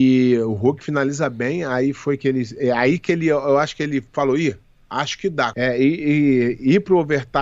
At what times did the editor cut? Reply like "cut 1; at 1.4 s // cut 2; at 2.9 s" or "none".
cut 1; at 5.5 s